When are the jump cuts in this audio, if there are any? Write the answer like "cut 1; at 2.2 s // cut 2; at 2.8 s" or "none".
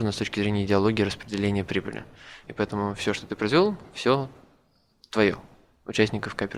cut 1; at 2.4 s

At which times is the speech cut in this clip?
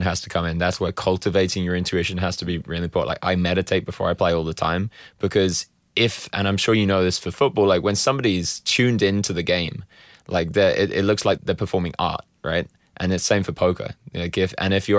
cut 1; at 11.4 s

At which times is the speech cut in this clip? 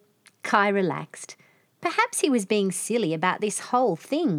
none

